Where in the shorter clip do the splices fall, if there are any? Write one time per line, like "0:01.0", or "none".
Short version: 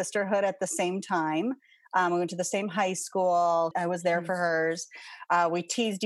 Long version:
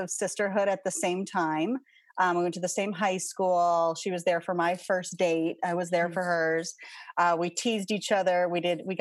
0:03.7